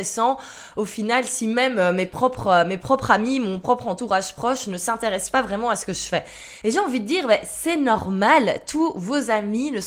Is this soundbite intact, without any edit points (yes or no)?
yes